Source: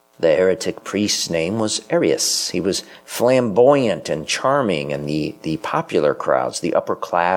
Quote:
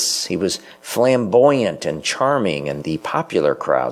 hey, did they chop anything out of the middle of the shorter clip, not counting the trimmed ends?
yes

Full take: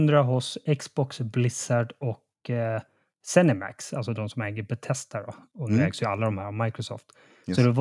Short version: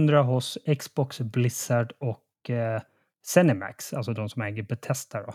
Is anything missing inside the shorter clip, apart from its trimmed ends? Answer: no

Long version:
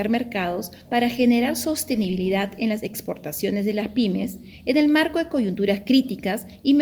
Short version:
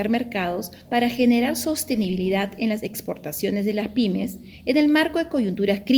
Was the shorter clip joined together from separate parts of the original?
no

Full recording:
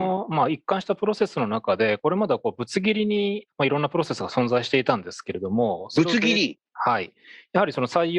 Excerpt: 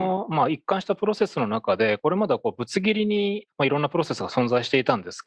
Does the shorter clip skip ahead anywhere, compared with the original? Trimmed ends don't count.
no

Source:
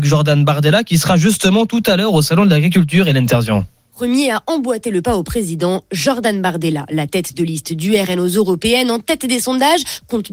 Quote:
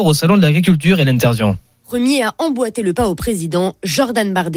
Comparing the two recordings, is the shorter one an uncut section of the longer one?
yes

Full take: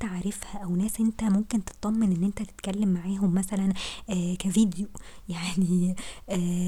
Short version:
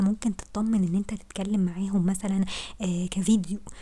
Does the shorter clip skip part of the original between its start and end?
no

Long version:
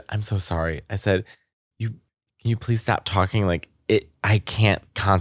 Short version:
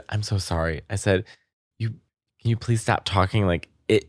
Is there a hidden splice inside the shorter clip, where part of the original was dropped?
no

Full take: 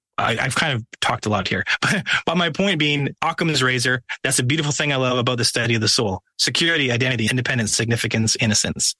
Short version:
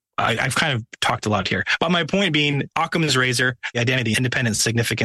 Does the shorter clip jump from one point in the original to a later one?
yes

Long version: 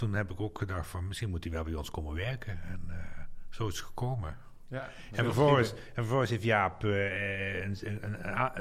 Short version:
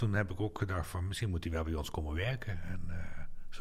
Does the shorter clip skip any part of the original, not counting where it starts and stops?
no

